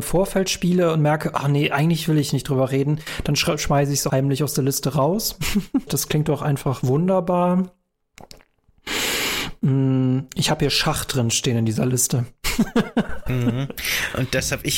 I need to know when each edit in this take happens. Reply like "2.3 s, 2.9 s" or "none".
4.1 s, 5.9 s